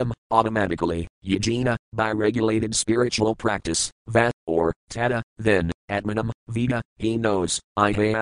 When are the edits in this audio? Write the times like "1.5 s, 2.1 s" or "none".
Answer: 6.4 s